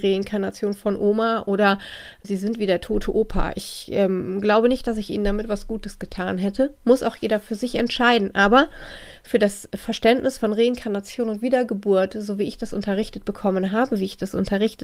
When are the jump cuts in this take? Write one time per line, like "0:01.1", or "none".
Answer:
0:02.2